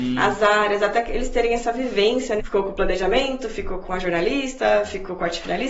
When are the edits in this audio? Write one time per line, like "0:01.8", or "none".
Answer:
0:02.4